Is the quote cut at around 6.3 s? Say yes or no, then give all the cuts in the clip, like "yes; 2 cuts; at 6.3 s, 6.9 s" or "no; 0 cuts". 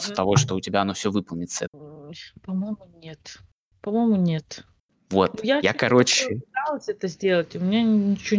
no; 1 cut; at 1.7 s